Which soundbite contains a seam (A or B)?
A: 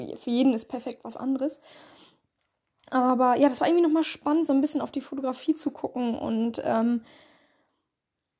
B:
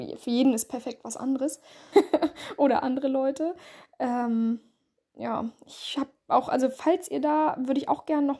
B